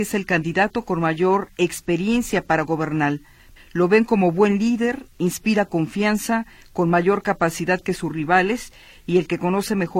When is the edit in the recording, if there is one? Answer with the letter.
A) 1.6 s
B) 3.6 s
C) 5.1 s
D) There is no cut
B